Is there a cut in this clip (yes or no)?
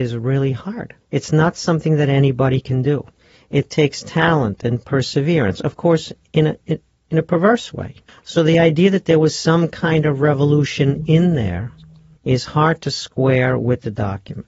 yes